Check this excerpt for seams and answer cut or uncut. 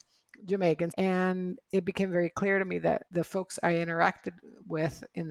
cut